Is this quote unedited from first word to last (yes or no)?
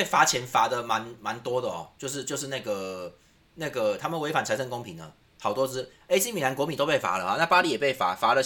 yes